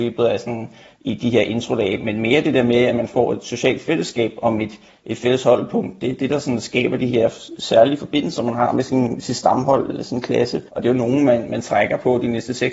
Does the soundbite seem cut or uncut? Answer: cut